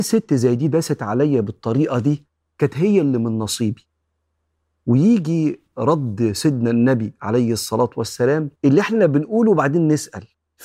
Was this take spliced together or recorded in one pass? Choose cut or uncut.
cut